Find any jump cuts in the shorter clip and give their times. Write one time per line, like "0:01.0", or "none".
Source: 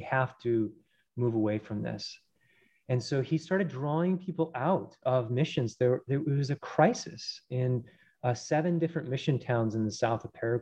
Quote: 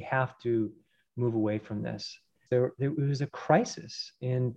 0:02.5